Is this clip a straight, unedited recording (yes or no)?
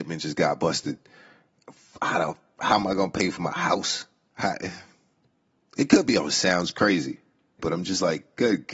no